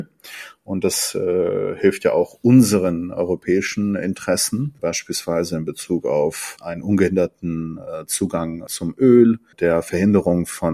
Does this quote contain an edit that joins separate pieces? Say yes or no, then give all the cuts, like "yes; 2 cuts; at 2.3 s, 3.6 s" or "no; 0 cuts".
no; 0 cuts